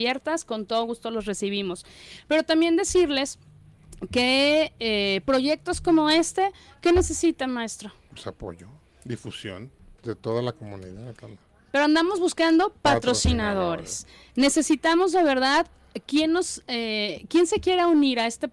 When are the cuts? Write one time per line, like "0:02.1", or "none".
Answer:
0:10.0